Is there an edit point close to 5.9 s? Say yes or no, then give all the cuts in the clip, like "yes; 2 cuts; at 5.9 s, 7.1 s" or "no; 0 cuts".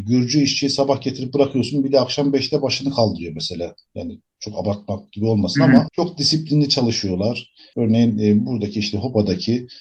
yes; 2 cuts; at 5.9 s, 7.7 s